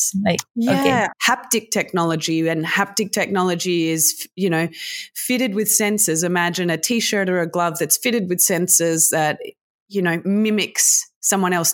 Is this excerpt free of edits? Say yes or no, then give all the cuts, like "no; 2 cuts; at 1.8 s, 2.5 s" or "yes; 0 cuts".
no; 1 cut; at 1.1 s